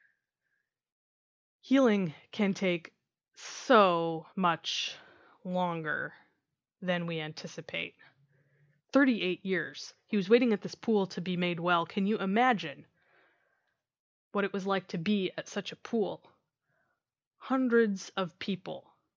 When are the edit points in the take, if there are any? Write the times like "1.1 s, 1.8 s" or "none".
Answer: 4.3 s, 8.8 s